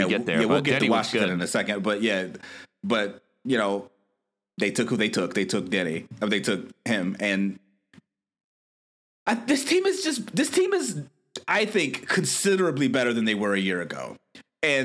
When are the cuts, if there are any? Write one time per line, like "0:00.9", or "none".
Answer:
none